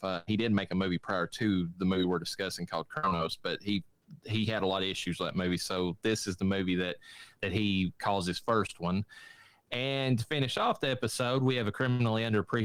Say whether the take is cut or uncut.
uncut